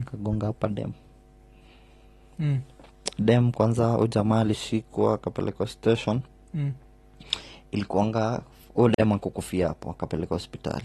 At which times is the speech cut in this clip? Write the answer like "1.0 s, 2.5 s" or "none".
none